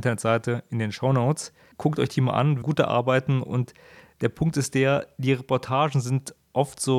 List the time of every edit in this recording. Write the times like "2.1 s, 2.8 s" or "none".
2.6 s